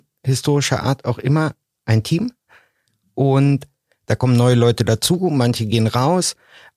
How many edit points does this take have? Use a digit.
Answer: 0